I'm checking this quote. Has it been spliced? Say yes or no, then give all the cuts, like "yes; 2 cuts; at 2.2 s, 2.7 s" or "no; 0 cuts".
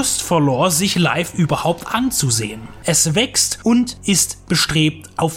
yes; 1 cut; at 2.8 s